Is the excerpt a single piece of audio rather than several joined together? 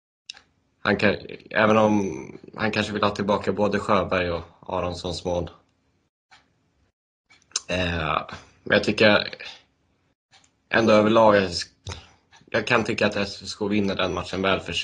yes; 0 cuts

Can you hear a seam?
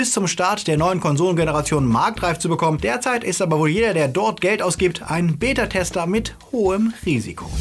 no; 0 cuts

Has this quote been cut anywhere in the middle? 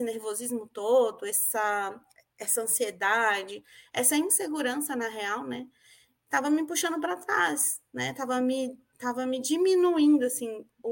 no; 0 cuts

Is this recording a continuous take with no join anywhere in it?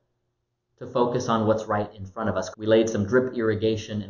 no; 1 cut; at 2.5 s

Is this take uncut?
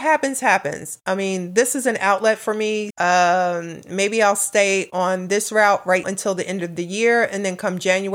no; 2 cuts; at 2.9 s, 6.0 s

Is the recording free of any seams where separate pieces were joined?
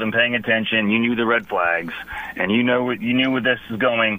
yes; 0 cuts

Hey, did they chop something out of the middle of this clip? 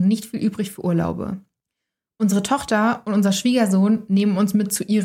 no; 0 cuts

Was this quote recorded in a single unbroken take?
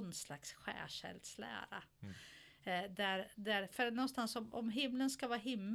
yes; 0 cuts

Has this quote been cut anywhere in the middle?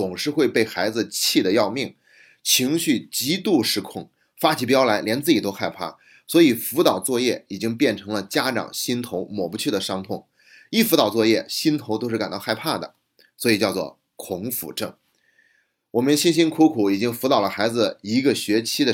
no; 0 cuts

